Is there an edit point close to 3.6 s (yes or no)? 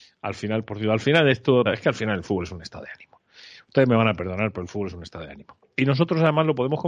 no